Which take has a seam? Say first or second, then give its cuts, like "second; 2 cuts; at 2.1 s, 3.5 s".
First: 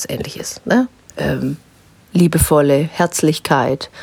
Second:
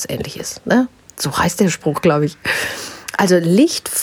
first; 1 cut; at 1.1 s